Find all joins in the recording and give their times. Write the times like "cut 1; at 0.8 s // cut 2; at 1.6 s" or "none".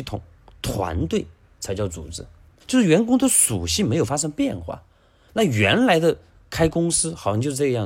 cut 1; at 2.6 s // cut 2; at 5.3 s